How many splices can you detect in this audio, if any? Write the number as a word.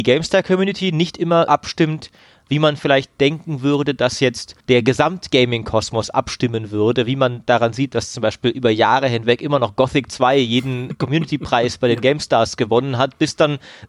three